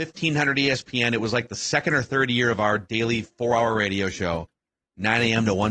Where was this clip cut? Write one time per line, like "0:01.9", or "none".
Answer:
none